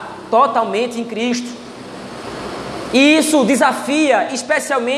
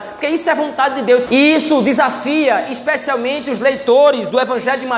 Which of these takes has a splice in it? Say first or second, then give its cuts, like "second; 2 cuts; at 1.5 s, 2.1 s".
second; 1 cut; at 1.3 s